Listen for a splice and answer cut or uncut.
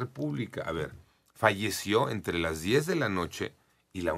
uncut